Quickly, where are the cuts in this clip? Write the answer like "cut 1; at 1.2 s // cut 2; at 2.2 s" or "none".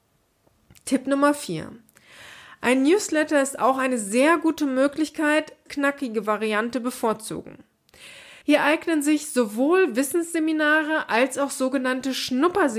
cut 1; at 5.7 s // cut 2; at 8.4 s

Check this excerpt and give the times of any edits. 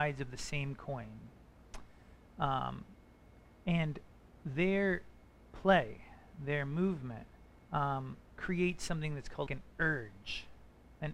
cut 1; at 8.3 s // cut 2; at 9.5 s

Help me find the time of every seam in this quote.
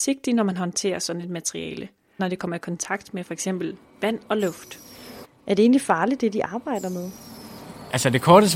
cut 1; at 2.2 s // cut 2; at 5.2 s

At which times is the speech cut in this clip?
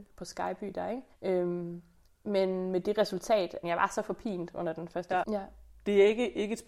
cut 1; at 1.1 s // cut 2; at 3.6 s // cut 3; at 5.2 s

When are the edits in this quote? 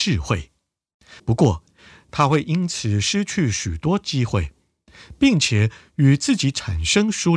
cut 1; at 1.2 s

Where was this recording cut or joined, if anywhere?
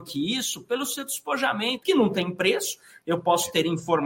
cut 1; at 1.8 s

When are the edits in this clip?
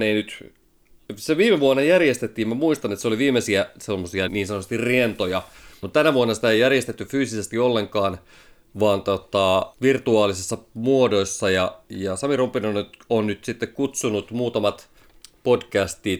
cut 1; at 4.3 s // cut 2; at 5.8 s

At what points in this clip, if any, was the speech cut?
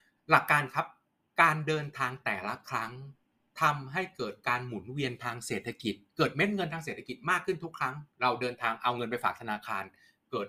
cut 1; at 8.1 s

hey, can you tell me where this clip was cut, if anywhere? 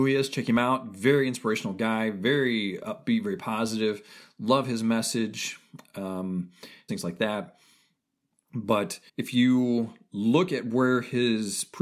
cut 1; at 6.9 s // cut 2; at 9.1 s

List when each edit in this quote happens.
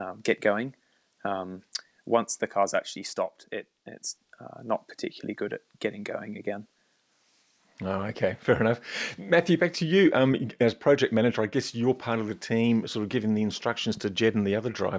none

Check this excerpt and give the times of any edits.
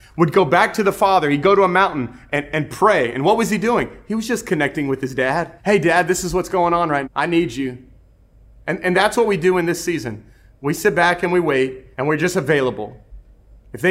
cut 1; at 5.6 s // cut 2; at 7.0 s // cut 3; at 11.9 s

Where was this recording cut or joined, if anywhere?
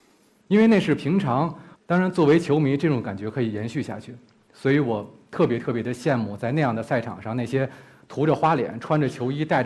cut 1; at 1.7 s

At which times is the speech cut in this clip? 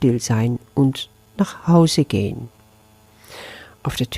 none

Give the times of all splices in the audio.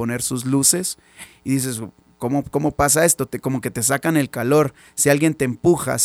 none

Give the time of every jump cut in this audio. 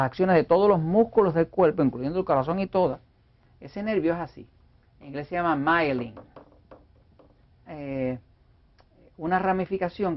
cut 1; at 4.8 s // cut 2; at 7.7 s

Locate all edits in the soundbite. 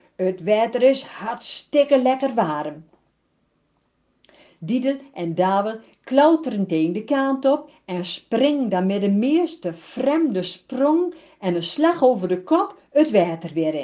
none

